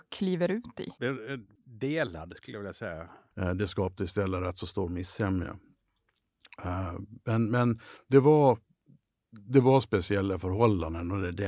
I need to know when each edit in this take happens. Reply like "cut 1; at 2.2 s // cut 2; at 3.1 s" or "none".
cut 1; at 3.3 s